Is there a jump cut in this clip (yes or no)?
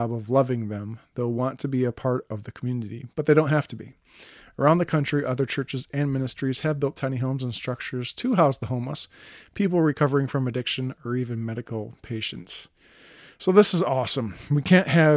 no